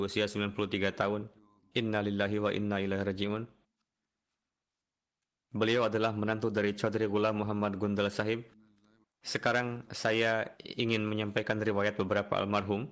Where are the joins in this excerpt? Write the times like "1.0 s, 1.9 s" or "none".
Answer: 9.0 s